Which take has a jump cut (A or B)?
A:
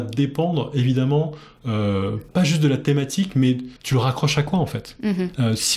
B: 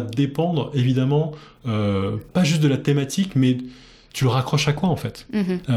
A